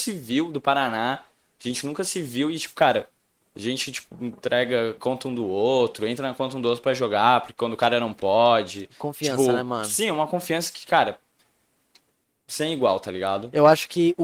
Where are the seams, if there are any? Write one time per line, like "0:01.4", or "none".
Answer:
none

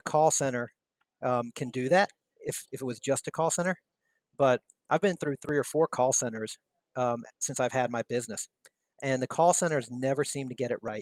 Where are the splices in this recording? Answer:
none

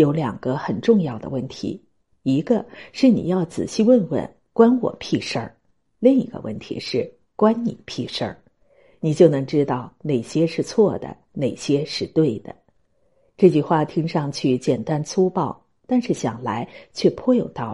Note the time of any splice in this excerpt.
none

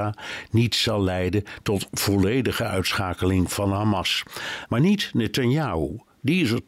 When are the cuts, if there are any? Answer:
0:04.7

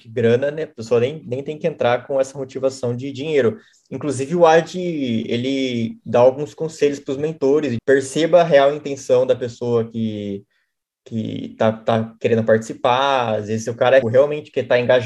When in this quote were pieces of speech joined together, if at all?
0:07.8
0:14.0

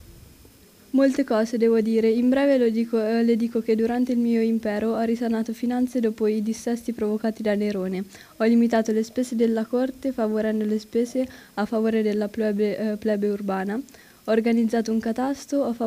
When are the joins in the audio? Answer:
none

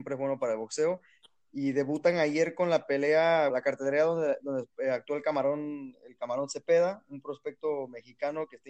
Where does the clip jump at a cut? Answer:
0:03.5

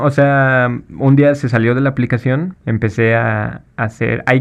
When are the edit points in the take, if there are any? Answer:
0:02.5

